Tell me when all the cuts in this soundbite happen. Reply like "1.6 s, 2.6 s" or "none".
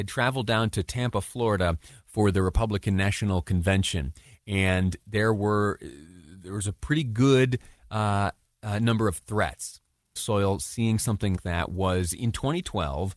10.2 s, 11.4 s